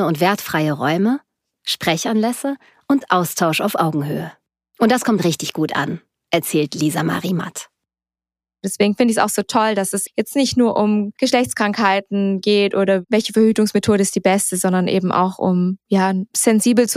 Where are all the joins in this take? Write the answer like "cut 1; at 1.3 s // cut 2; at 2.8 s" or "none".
cut 1; at 10.1 s